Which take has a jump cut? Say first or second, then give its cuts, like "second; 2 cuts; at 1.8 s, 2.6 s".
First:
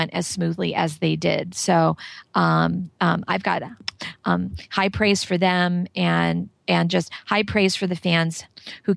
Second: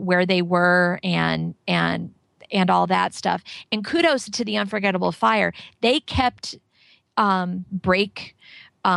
second; 1 cut; at 7.7 s